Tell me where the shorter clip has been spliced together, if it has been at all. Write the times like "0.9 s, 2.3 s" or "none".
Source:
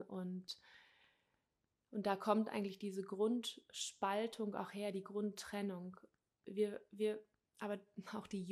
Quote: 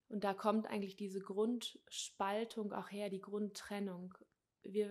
none